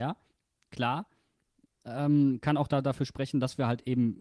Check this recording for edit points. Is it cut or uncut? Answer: uncut